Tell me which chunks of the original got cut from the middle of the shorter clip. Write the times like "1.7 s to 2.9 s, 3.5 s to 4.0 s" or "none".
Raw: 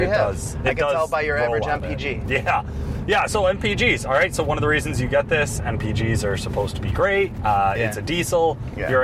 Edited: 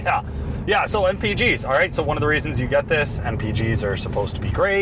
none